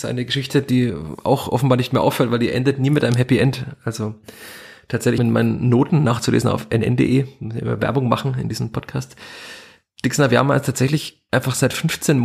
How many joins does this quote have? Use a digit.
1